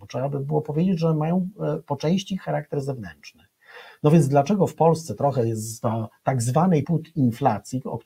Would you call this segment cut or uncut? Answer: cut